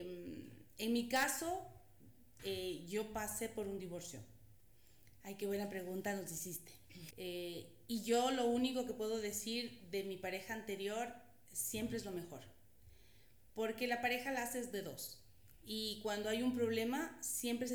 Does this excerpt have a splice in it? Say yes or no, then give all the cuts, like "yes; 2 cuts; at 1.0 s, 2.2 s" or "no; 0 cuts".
yes; 3 cuts; at 2.4 s, 5.2 s, 7.1 s